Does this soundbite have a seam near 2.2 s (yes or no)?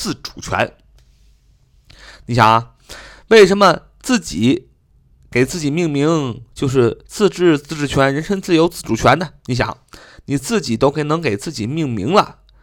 yes